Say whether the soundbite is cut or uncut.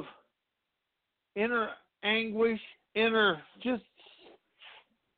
uncut